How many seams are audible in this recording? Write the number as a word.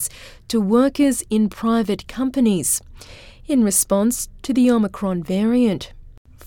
zero